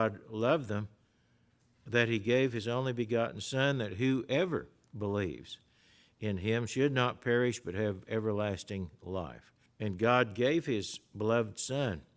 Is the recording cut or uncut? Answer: cut